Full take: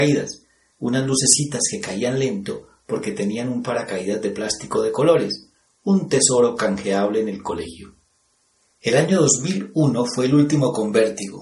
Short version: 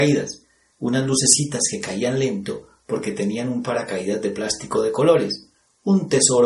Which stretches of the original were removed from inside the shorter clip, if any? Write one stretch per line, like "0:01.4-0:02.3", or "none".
none